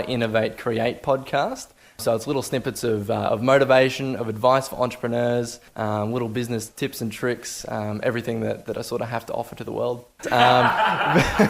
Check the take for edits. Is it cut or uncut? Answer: cut